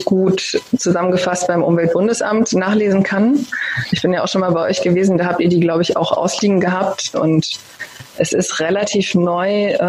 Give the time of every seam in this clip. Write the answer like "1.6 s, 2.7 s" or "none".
7.1 s